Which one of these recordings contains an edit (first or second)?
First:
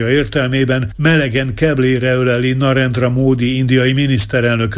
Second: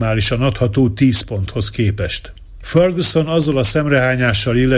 second